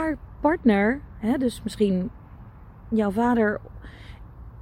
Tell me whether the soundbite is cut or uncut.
uncut